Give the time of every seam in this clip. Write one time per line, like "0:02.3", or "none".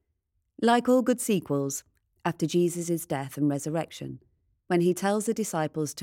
0:02.1